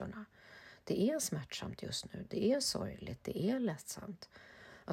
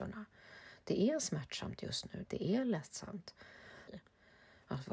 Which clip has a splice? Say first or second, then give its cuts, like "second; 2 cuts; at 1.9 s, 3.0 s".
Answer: second; 2 cuts; at 2.3 s, 3.9 s